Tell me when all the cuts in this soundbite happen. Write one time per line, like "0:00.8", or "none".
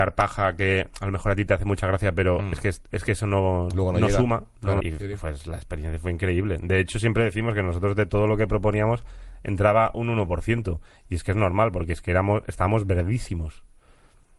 0:03.7
0:04.8